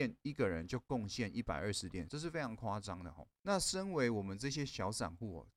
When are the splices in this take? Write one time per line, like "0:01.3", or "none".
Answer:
0:02.1